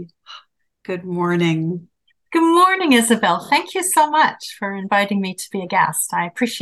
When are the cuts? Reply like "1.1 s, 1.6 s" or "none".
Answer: none